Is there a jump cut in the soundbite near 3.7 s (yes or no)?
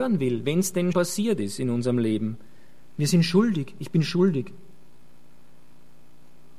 no